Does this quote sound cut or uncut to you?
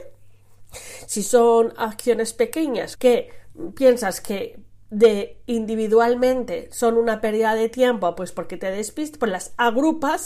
cut